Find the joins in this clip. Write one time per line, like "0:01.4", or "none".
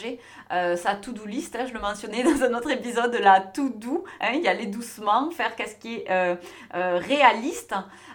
none